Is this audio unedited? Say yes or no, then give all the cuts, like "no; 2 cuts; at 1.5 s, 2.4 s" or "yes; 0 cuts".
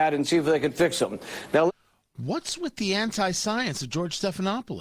yes; 0 cuts